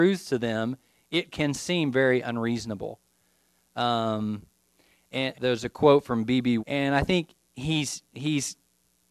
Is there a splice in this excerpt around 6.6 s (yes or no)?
yes